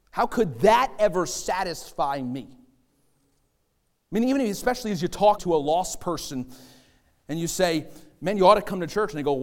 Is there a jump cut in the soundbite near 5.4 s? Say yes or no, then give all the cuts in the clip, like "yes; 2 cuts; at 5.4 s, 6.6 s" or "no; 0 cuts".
yes; 1 cut; at 5.4 s